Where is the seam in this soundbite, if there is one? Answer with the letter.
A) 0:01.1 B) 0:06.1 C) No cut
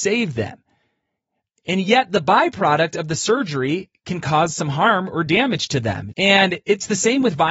B